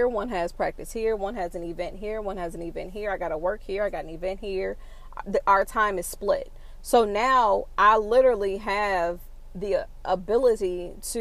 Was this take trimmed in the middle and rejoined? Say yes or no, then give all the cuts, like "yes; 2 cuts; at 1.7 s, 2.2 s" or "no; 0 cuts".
no; 0 cuts